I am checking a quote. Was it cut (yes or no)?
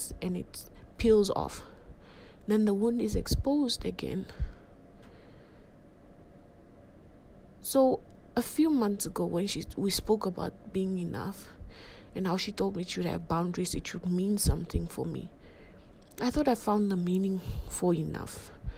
no